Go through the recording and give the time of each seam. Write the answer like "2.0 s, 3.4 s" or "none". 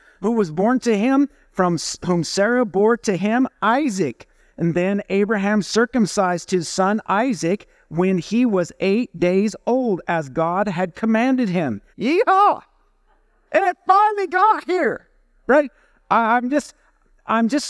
11.9 s